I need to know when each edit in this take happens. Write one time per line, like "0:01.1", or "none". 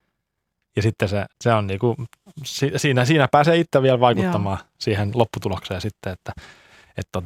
0:01.3